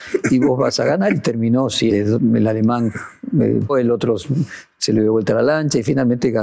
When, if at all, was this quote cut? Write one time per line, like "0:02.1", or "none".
0:01.9
0:03.7